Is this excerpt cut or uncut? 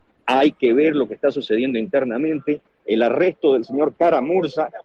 uncut